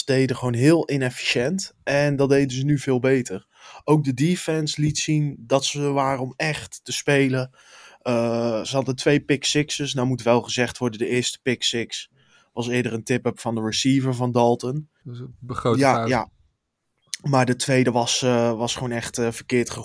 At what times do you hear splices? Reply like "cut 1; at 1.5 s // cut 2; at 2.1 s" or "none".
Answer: cut 1; at 15.0 s